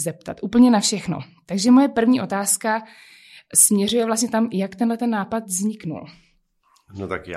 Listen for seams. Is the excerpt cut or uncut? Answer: uncut